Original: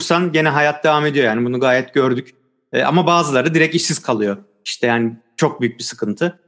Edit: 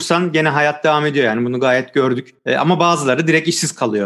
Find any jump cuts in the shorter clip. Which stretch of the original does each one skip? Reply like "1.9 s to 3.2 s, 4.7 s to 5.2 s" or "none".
2.4 s to 2.7 s